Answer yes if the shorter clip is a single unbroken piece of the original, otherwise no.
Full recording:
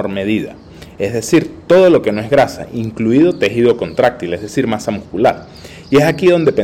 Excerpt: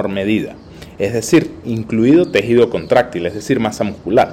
no